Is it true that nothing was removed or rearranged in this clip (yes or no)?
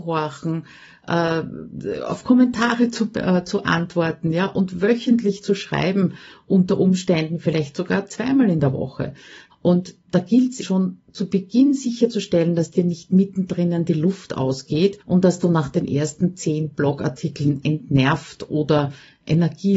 no